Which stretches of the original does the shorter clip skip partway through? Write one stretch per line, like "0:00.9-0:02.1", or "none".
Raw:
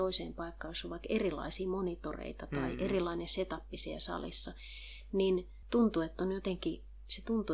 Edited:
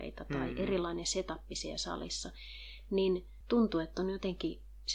none